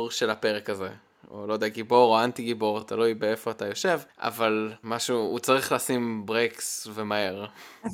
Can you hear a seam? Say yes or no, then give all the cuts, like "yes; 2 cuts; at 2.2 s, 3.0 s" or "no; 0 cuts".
no; 0 cuts